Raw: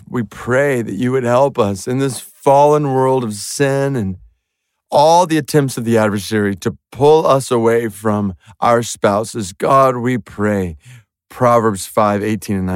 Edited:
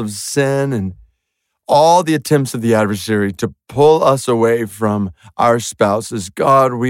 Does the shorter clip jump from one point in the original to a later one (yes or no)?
no